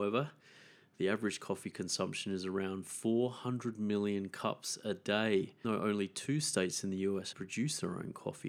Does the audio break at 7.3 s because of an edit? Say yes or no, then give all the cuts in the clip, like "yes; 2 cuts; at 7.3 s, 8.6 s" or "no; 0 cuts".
yes; 2 cuts; at 5.6 s, 7.3 s